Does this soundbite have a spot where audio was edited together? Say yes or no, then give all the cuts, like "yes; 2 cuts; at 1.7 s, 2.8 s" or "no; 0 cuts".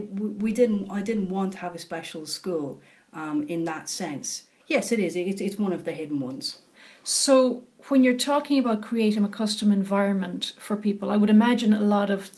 yes; 1 cut; at 4.6 s